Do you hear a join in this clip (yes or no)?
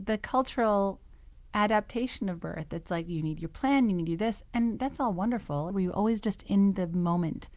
yes